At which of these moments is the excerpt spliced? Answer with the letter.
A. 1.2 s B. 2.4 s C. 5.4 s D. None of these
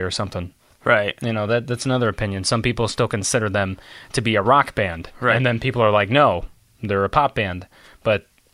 D